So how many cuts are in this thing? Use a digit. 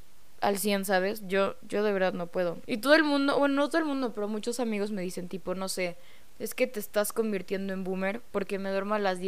1